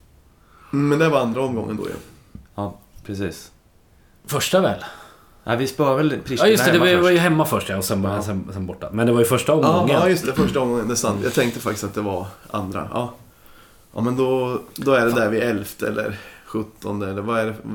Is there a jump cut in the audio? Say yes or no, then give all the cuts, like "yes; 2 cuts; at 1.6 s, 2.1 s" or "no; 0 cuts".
no; 0 cuts